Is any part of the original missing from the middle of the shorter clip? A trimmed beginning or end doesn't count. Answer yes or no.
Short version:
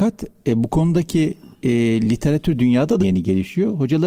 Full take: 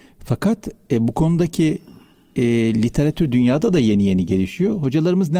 yes